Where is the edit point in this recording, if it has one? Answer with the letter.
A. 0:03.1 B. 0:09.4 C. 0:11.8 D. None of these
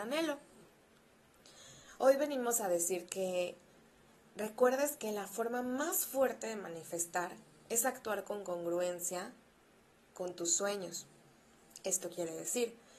A